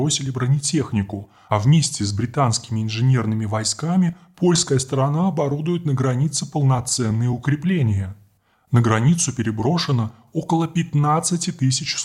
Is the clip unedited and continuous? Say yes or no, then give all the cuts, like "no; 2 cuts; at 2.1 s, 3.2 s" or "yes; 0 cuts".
yes; 0 cuts